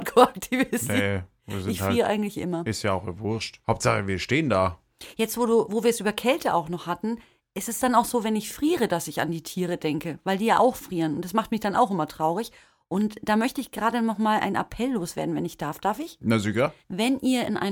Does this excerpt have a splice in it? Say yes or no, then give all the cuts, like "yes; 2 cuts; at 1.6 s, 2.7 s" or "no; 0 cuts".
no; 0 cuts